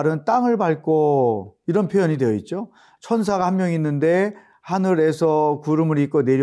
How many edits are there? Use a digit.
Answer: 1